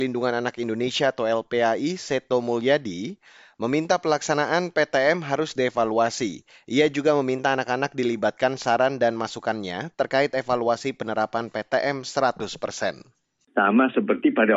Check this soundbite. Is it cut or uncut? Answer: uncut